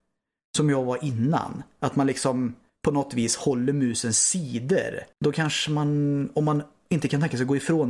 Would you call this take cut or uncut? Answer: cut